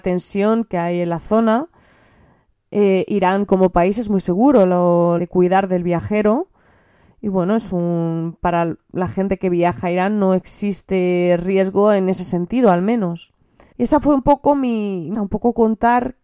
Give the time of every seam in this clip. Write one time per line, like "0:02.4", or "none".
0:05.2
0:13.7
0:15.1